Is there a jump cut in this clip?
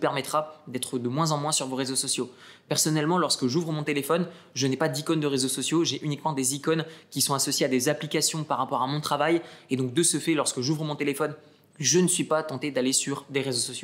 no; 0 cuts

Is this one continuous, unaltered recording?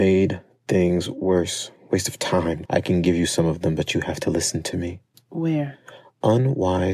no; 1 cut; at 2.7 s

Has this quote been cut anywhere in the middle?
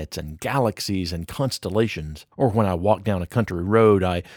yes; 1 cut; at 2.3 s

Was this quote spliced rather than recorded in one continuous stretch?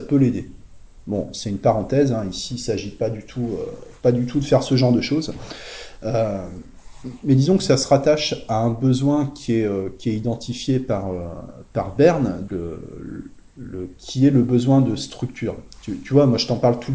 yes; 2 cuts; at 12.5 s, 14.0 s

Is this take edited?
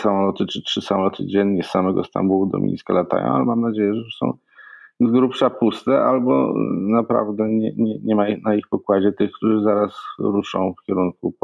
no; 0 cuts

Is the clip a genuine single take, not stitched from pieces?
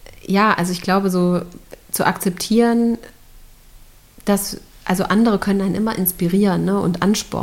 yes; 0 cuts

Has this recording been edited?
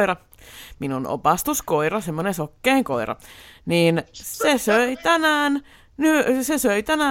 no; 0 cuts

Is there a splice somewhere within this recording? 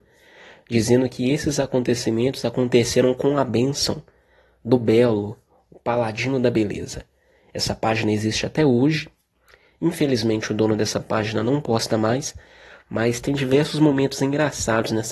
no; 0 cuts

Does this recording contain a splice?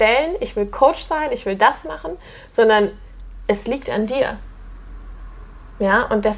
no; 0 cuts

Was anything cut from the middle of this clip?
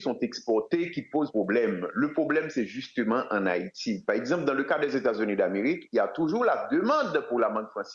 no; 0 cuts

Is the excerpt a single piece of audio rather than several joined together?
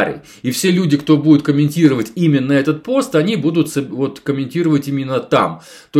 yes; 0 cuts

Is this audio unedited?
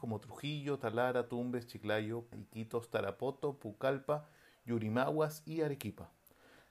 no; 1 cut; at 2.3 s

